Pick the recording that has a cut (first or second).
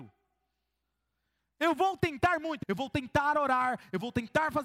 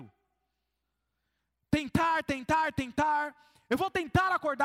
first